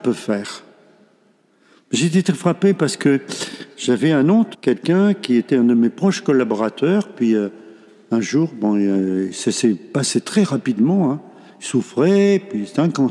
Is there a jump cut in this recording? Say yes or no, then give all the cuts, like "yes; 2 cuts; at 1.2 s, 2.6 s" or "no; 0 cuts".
yes; 1 cut; at 4.5 s